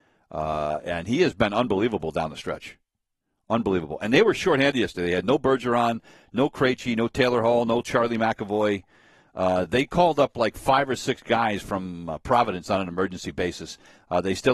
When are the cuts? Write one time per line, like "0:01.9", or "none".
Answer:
none

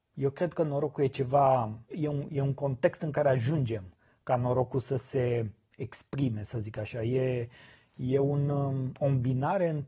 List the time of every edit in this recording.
0:01.9

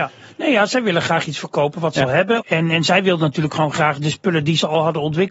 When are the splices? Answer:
0:02.4

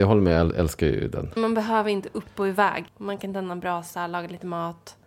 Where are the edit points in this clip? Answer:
0:01.4
0:02.9

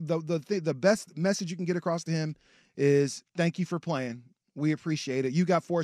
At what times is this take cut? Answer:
0:03.3

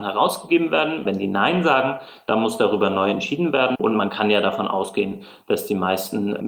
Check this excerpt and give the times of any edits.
0:01.0
0:03.7

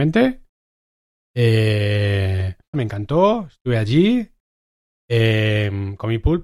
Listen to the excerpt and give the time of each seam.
0:02.7

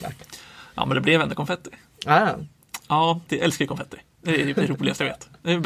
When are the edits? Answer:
0:03.3

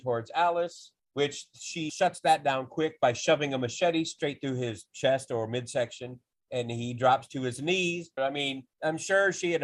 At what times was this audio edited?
0:01.9
0:08.2

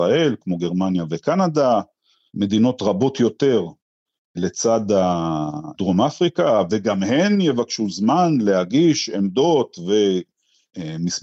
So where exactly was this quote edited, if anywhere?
none

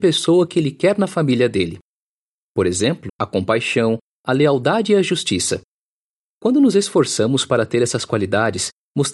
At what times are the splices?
0:03.1

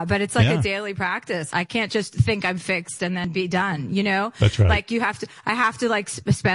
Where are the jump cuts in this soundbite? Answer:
0:01.5

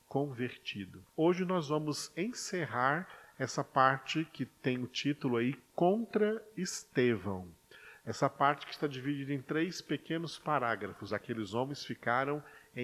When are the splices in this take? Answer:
0:01.1
0:11.1

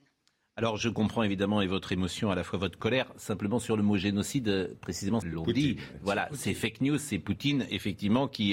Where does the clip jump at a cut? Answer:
0:05.2

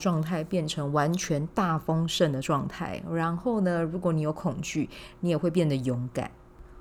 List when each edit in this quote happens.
none

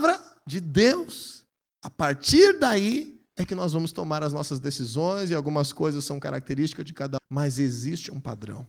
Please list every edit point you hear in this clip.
0:01.7
0:07.2

